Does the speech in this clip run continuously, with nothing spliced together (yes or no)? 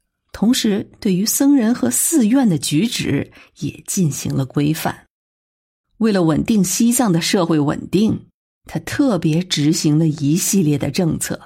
no